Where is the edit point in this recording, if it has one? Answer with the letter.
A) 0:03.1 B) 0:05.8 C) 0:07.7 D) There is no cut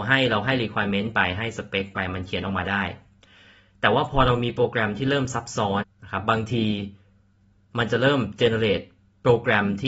B